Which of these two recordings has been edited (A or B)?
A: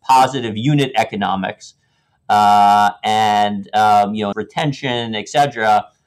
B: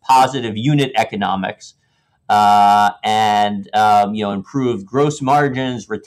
A